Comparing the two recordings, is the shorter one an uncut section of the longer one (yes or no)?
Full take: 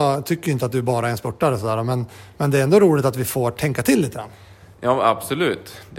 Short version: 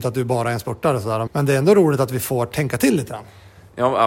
no